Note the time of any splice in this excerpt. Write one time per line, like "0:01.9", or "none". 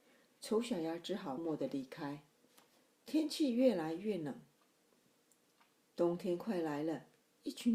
0:01.4